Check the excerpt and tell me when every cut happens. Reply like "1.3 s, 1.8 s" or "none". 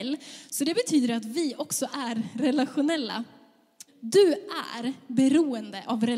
3.9 s